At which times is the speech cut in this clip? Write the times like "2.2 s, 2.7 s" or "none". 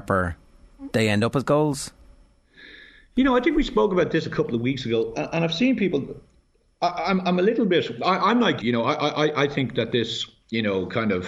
8.6 s